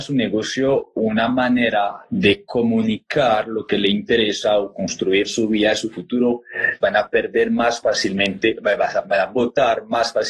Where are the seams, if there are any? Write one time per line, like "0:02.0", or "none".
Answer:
0:06.8